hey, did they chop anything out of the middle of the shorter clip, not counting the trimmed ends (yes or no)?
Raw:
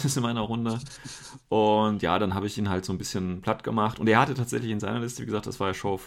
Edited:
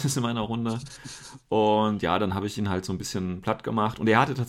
no